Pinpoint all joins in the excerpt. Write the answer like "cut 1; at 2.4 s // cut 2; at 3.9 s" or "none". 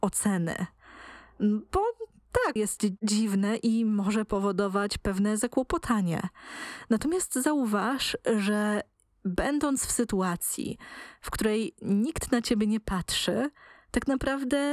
cut 1; at 2.6 s